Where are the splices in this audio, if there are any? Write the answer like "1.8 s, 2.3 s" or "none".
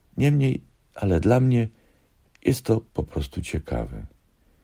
none